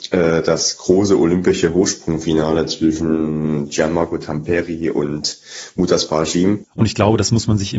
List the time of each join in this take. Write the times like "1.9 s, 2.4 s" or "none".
6.7 s